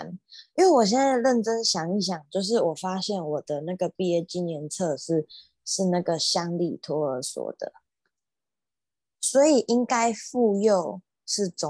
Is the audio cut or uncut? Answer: uncut